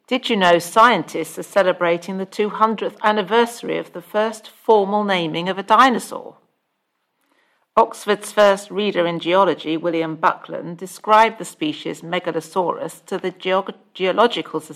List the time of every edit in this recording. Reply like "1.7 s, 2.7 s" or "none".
none